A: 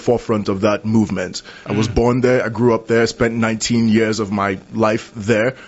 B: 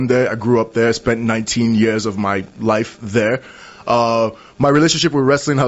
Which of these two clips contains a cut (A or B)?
A